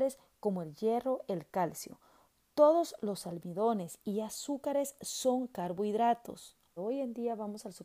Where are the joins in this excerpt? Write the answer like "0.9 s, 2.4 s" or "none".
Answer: 6.8 s